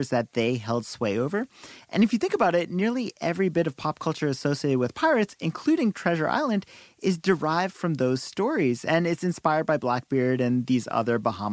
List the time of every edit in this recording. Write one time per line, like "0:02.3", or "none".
none